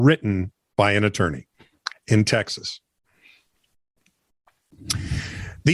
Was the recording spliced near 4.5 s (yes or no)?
no